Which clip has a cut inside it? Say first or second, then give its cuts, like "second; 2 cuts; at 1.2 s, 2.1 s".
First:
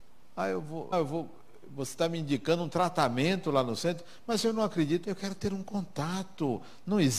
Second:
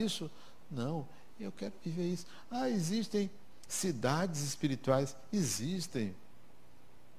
first; 2 cuts; at 0.9 s, 5.0 s